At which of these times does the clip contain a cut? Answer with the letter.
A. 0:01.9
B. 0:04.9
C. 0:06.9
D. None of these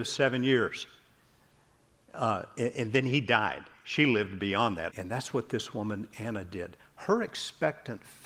B